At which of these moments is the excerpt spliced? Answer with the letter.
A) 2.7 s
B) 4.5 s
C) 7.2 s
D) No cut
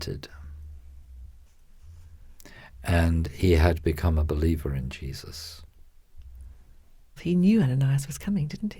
C